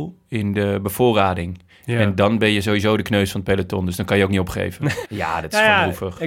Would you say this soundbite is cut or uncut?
cut